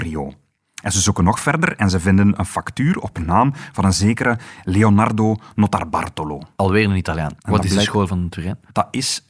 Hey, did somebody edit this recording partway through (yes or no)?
yes